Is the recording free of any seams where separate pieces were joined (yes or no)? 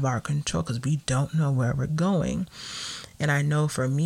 yes